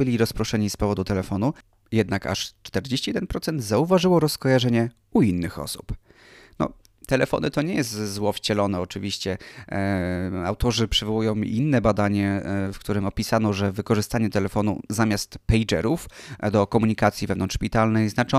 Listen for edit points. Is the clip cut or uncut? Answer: uncut